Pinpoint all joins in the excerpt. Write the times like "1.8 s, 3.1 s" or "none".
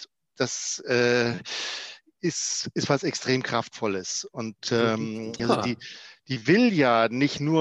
5.4 s